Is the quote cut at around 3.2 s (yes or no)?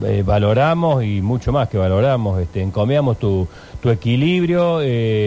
no